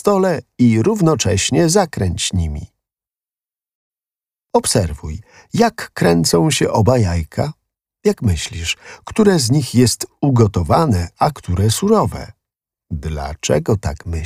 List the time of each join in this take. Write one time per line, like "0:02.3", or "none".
none